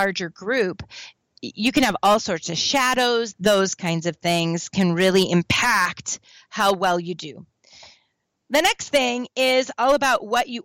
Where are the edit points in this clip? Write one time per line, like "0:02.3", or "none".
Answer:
0:03.3